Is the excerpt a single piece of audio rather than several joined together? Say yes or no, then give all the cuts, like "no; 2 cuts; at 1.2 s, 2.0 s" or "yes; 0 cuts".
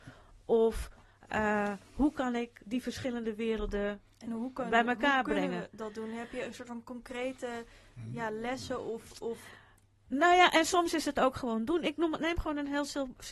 yes; 0 cuts